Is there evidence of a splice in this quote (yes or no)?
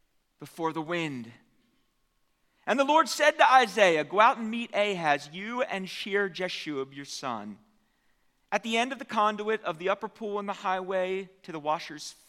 no